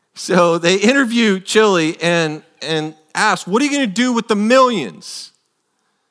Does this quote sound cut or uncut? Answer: uncut